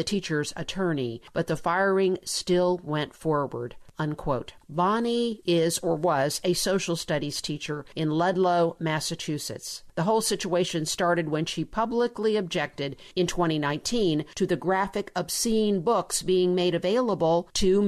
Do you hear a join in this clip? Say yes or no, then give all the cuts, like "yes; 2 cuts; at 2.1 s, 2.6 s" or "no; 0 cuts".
no; 0 cuts